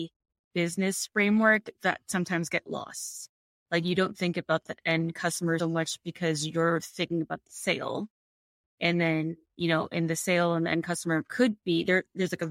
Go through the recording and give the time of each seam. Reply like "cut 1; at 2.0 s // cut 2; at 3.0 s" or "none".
cut 1; at 5.6 s